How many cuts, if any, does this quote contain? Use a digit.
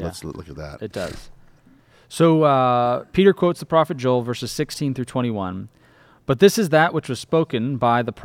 0